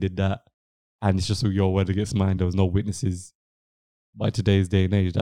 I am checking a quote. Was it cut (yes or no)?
no